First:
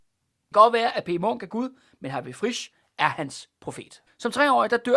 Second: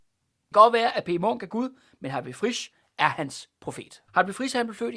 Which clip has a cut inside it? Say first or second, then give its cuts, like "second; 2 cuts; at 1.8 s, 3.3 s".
first; 1 cut; at 4.1 s